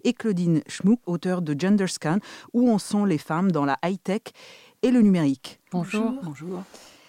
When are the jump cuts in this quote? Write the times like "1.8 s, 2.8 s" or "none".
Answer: 1.0 s, 5.7 s